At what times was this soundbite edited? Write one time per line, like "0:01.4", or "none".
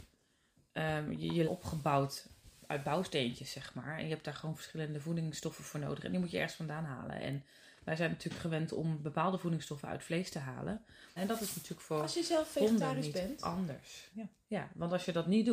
0:01.4
0:11.2
0:14.1